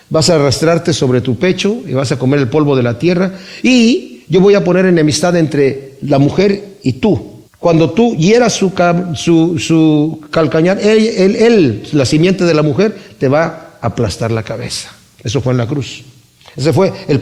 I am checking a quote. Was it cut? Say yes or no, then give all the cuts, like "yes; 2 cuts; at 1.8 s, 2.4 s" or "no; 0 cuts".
yes; 1 cut; at 7.5 s